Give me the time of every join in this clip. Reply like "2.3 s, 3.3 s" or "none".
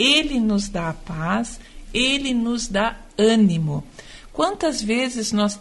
none